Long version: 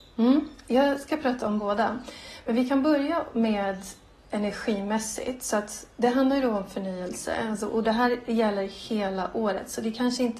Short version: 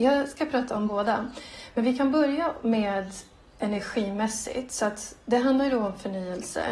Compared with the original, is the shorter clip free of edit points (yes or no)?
yes